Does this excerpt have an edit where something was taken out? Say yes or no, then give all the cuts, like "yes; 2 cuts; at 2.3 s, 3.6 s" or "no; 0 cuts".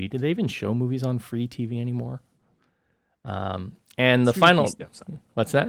no; 0 cuts